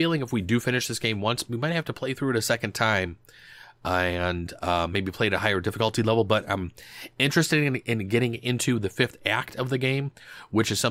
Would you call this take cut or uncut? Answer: uncut